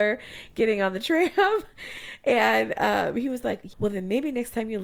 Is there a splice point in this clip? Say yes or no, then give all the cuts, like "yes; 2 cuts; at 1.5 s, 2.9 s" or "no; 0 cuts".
yes; 1 cut; at 3.7 s